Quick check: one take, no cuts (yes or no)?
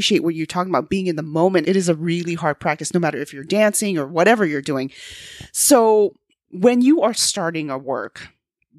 no